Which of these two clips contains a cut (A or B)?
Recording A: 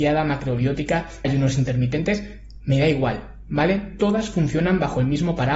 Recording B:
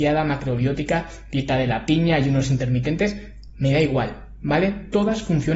A